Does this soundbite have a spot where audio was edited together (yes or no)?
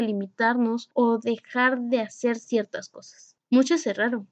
no